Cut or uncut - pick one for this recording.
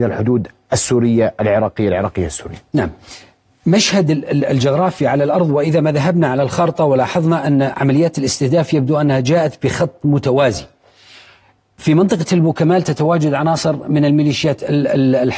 uncut